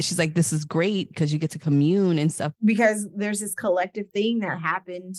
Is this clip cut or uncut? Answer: cut